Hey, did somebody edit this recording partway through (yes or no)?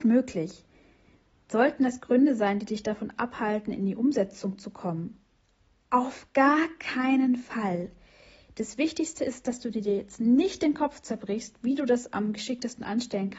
no